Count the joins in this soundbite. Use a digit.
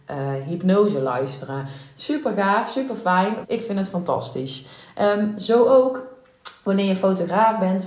1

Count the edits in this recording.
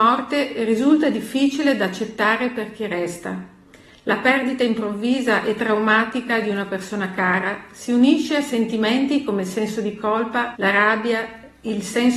1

